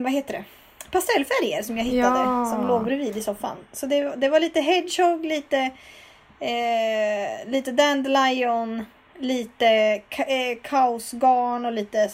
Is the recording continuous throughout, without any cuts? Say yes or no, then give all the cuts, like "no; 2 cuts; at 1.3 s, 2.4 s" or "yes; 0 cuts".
yes; 0 cuts